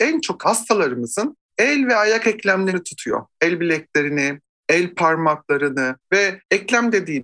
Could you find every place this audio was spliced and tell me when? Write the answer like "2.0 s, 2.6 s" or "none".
6.0 s